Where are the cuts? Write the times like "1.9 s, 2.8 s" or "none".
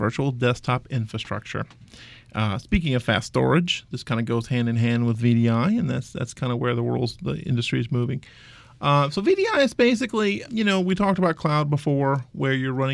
10.4 s